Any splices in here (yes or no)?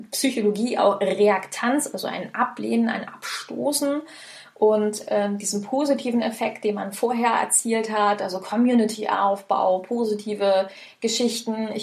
no